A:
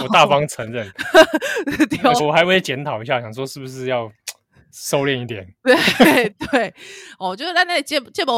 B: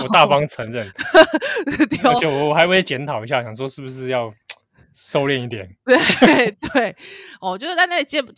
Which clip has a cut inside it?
A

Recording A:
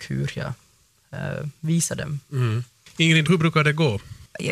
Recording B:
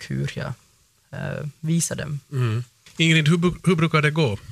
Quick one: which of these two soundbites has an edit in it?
A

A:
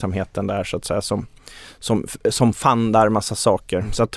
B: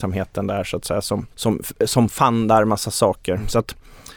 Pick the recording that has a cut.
B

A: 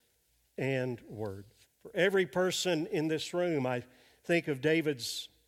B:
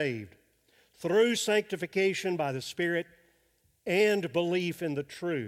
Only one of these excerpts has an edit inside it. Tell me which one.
A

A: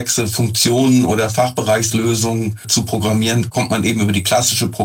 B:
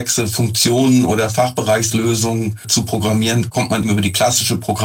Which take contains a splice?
B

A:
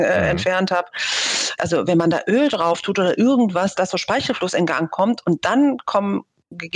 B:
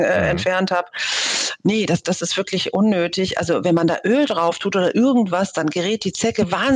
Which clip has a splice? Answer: A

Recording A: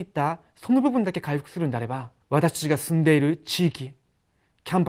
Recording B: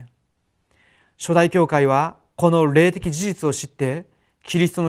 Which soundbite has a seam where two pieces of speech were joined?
A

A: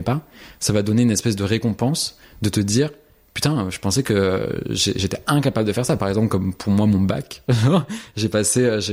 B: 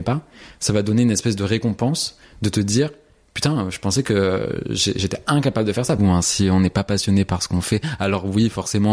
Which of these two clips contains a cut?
B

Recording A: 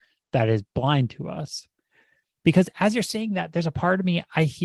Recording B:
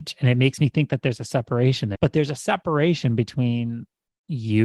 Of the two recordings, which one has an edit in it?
B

